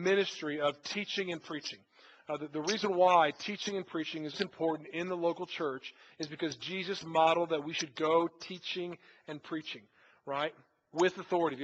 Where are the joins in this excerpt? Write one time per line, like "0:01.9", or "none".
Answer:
0:04.3